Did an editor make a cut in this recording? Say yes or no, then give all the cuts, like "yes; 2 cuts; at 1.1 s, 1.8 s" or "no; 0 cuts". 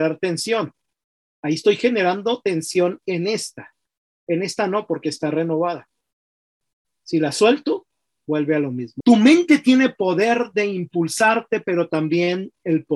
yes; 1 cut; at 9.0 s